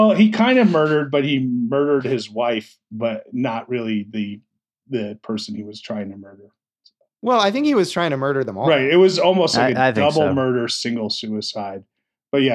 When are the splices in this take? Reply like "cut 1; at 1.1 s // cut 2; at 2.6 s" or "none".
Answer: none